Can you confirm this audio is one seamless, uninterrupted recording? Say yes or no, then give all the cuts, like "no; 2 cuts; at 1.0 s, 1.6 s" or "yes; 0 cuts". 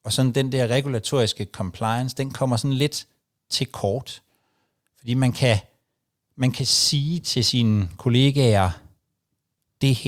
yes; 0 cuts